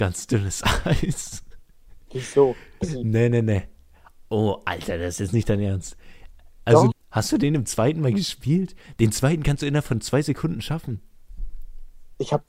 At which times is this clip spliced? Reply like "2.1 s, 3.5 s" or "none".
2.8 s, 6.9 s